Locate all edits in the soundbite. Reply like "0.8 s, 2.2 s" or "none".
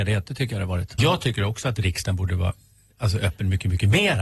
1.0 s